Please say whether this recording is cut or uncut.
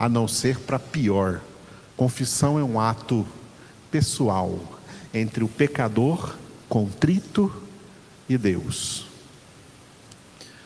cut